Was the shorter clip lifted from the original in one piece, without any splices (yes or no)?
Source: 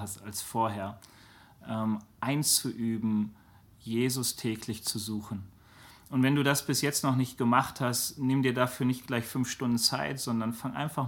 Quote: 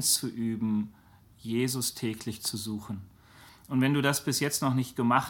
yes